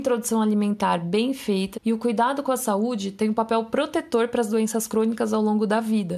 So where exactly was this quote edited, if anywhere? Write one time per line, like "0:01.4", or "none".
0:01.7